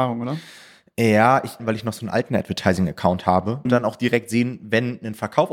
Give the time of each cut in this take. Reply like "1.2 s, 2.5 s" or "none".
1.6 s, 3.6 s